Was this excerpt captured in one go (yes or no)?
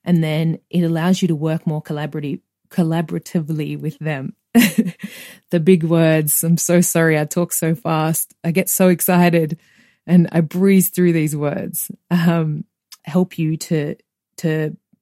no